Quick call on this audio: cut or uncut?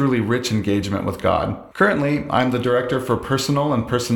cut